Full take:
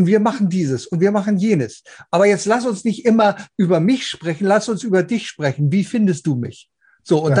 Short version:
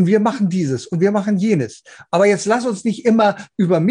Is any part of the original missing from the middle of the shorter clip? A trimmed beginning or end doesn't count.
no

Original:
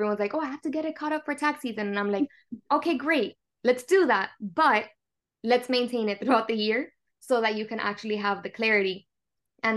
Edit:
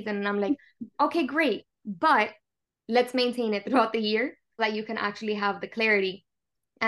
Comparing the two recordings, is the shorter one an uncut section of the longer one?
no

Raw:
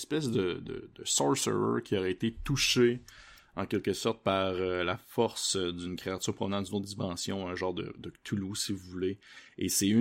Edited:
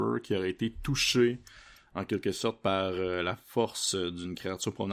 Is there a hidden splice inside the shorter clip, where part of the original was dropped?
no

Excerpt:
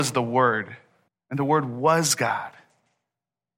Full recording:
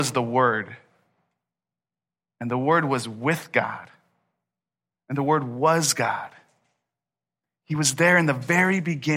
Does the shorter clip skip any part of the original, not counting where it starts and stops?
yes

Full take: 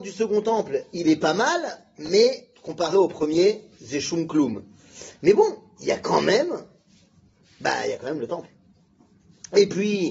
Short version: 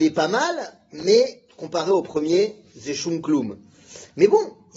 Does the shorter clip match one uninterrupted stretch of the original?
yes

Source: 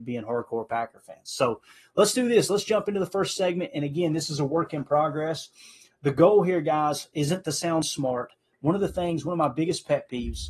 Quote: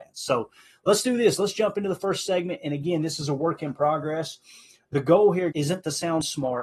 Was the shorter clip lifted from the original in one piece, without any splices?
no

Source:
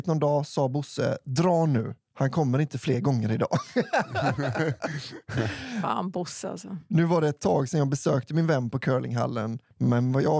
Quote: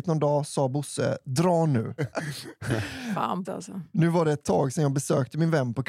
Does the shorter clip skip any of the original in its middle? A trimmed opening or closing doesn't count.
yes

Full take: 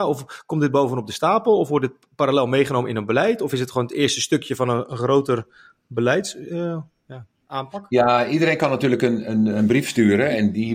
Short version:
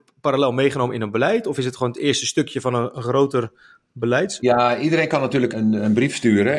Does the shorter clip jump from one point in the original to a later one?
yes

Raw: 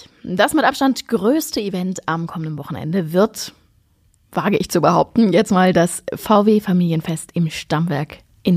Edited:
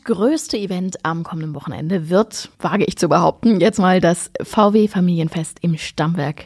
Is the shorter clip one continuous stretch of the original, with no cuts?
no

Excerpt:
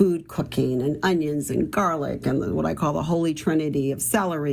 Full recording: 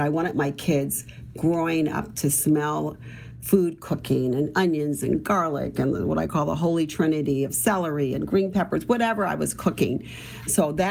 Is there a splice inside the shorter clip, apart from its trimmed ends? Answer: no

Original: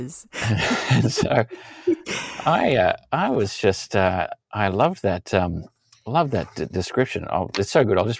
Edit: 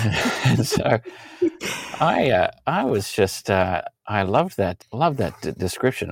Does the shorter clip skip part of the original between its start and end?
yes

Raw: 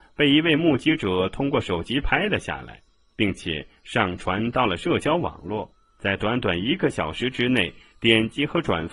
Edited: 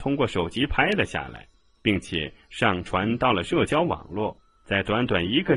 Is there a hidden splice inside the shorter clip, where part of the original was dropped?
no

